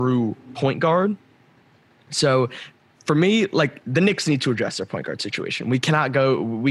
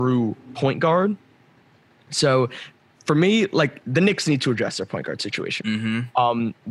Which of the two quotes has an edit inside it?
second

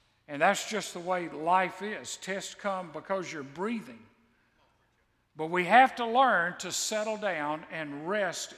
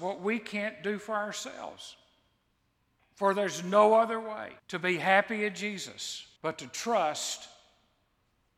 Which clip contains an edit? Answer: second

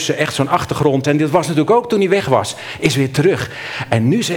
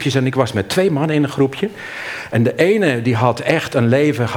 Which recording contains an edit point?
first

